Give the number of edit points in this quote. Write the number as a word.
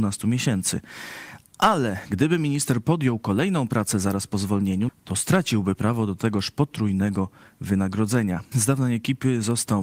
two